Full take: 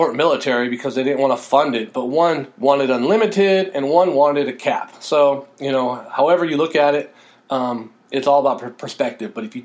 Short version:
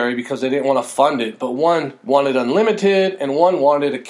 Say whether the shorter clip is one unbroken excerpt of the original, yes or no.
yes